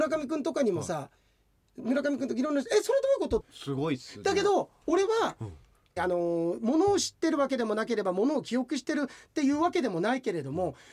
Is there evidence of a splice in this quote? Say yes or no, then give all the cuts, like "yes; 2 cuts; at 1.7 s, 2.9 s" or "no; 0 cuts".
yes; 2 cuts; at 3.4 s, 6.0 s